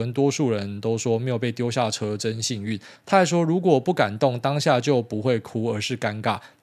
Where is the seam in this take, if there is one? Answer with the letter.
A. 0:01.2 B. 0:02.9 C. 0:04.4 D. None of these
B